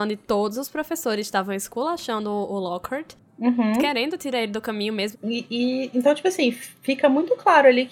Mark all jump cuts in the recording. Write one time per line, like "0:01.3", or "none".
0:05.1